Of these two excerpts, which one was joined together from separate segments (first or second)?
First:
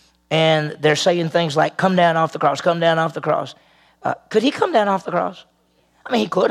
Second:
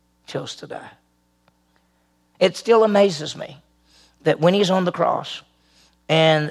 second